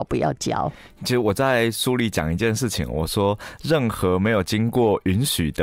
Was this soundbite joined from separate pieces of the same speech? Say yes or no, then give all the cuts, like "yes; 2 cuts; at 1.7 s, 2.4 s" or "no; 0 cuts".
no; 0 cuts